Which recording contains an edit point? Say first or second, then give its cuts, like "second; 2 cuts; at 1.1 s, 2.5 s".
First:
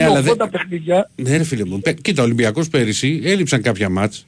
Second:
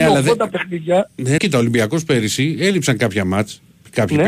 second; 1 cut; at 1.4 s